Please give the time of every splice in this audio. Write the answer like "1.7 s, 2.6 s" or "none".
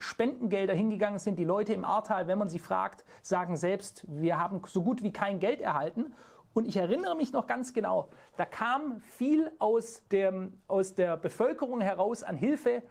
10.1 s

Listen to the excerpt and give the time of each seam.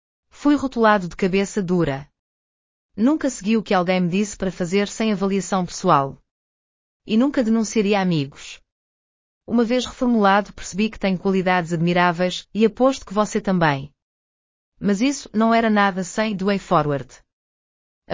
none

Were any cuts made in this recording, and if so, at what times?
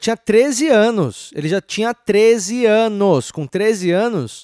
none

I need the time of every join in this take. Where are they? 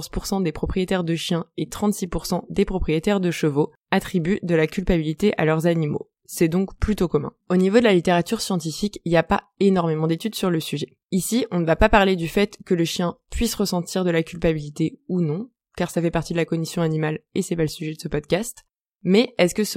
7.4 s, 11.0 s

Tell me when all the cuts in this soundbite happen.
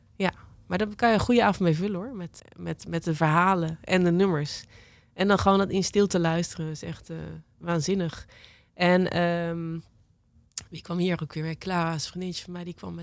2.4 s

